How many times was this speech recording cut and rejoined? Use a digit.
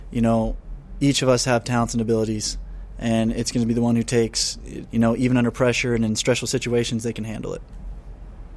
1